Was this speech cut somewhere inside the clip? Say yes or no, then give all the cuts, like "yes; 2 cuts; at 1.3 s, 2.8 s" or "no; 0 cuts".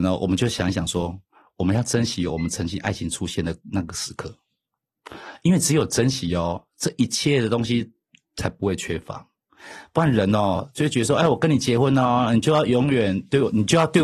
no; 0 cuts